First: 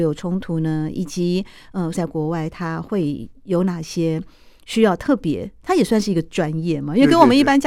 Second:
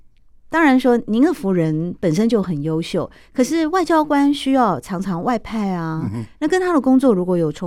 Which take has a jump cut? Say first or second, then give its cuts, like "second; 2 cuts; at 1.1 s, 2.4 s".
first; 1 cut; at 1.9 s